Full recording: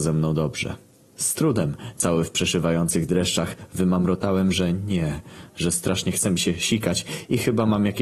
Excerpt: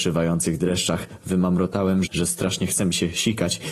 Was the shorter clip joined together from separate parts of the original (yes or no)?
yes